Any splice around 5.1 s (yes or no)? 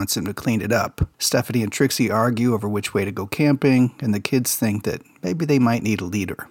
no